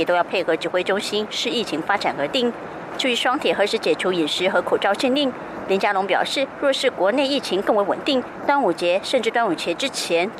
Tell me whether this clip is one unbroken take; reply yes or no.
yes